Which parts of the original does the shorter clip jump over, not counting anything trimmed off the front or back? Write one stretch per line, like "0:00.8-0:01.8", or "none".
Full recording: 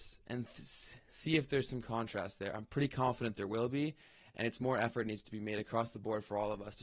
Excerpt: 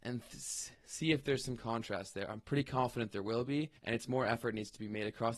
0:04.0-0:04.3